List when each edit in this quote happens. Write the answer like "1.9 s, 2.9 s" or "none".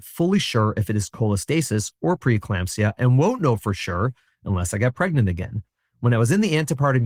none